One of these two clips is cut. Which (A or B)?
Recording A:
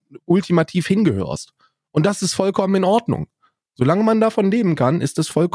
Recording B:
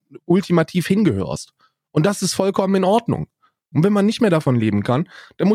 B